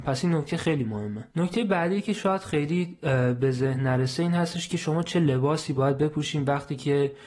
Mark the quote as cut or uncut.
cut